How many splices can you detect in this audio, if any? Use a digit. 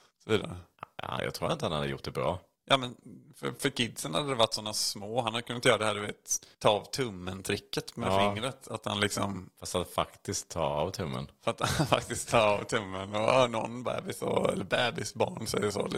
1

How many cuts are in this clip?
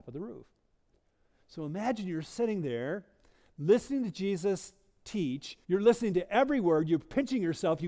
1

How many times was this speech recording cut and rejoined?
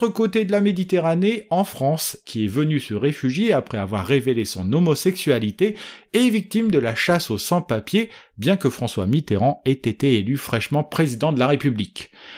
1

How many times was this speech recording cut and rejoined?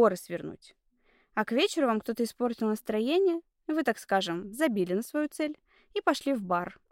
0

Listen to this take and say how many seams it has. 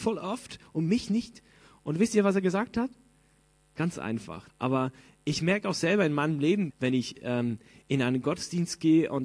2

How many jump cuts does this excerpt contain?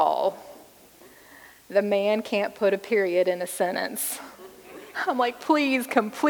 0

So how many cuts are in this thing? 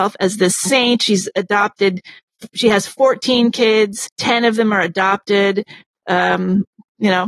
2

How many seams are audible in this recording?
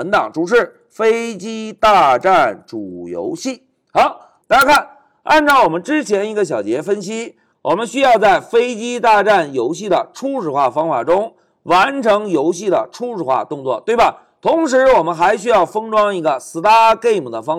1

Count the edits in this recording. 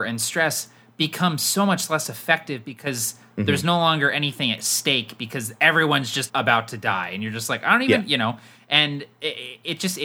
1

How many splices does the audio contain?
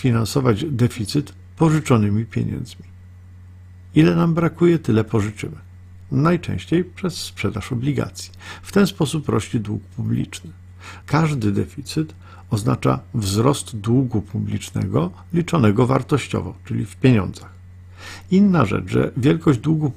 1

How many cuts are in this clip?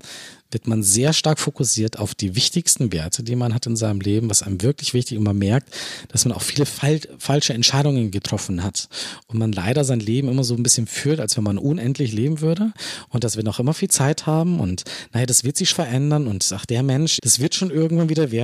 2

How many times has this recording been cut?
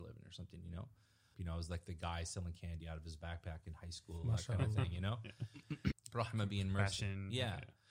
2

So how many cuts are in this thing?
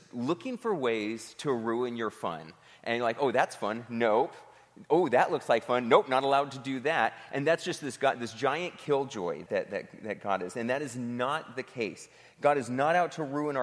1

